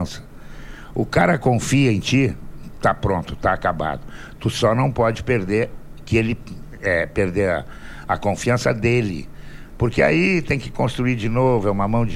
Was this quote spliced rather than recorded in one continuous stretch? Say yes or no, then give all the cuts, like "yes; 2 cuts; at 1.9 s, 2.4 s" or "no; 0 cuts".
no; 0 cuts